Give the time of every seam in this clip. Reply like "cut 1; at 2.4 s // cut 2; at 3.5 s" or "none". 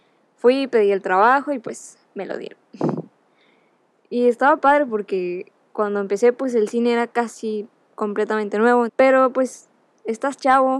cut 1; at 8.9 s